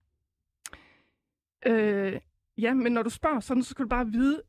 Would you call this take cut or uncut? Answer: uncut